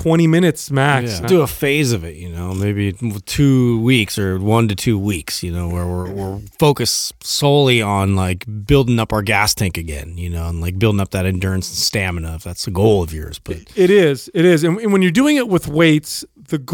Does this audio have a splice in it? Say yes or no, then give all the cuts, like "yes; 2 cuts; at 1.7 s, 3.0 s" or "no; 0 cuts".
yes; 1 cut; at 1.2 s